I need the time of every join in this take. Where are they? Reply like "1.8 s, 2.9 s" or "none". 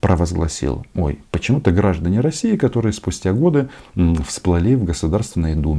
none